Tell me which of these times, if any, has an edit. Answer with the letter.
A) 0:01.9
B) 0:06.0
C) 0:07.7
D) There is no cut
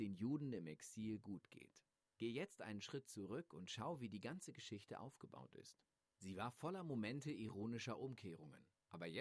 D